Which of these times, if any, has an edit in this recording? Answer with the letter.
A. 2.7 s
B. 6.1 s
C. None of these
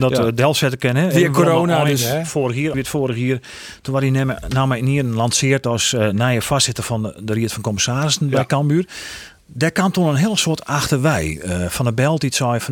A